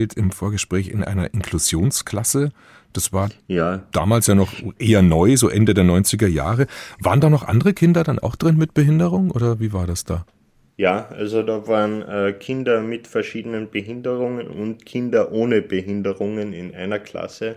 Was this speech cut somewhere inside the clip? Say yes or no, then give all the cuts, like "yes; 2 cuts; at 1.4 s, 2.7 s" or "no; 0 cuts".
no; 0 cuts